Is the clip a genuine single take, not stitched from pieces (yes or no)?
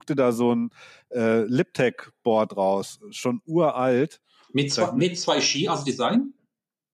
yes